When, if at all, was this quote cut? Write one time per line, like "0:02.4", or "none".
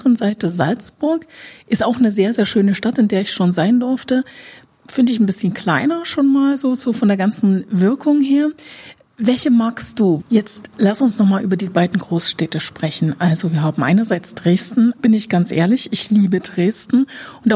0:10.2
0:15.0